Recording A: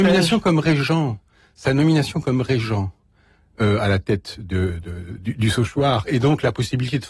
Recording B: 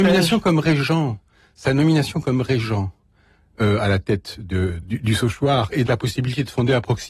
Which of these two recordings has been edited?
B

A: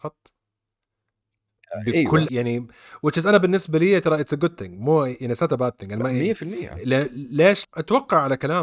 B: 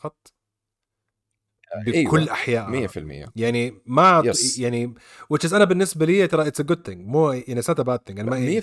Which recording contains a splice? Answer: A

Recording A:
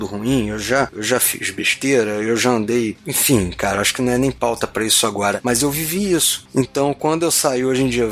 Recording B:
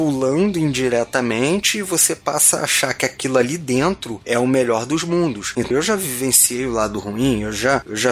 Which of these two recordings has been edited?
B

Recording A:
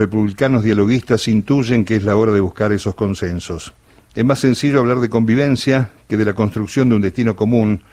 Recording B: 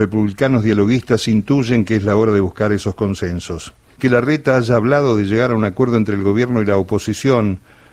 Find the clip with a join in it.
B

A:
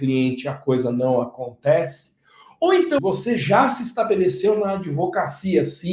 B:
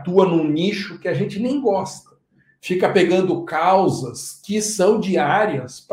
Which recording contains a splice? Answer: A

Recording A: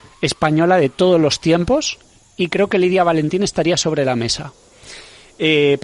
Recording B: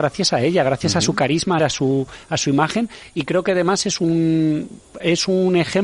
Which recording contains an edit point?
B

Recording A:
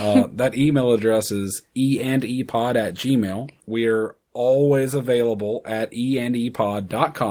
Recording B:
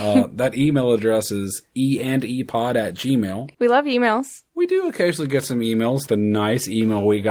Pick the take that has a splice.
B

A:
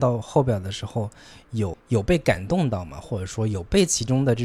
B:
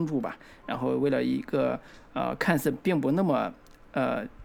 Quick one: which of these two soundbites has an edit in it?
A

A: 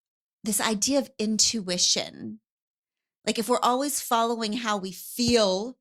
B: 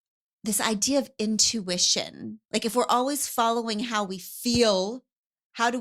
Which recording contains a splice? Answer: B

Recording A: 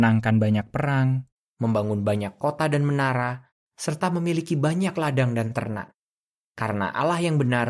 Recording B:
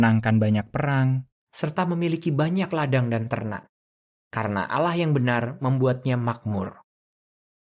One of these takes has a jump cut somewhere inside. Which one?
B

